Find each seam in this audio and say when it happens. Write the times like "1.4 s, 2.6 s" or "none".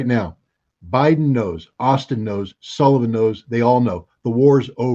none